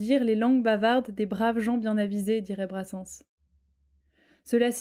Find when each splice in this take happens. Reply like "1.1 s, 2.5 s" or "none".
none